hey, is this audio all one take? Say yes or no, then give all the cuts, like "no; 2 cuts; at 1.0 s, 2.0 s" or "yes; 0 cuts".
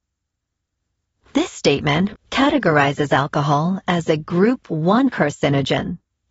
no; 1 cut; at 2.2 s